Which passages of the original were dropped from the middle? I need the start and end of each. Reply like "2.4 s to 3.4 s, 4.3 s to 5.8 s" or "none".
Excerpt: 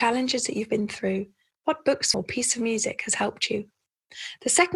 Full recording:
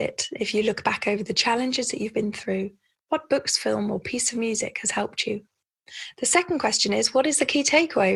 3.6 s to 3.9 s